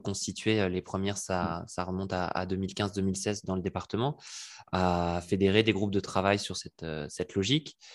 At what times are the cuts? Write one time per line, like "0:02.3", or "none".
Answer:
none